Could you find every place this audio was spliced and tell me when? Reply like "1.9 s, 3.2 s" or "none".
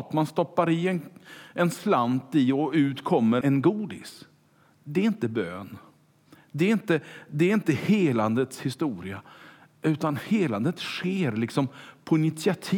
3.4 s